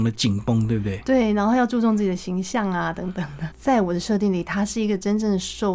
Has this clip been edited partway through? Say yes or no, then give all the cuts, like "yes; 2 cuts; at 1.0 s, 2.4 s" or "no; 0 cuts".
yes; 1 cut; at 3.5 s